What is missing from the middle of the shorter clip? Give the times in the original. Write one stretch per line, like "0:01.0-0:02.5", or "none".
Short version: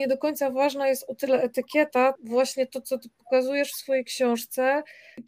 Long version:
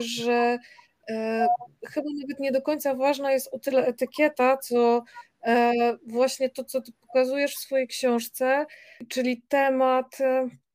0:04.6-0:06.0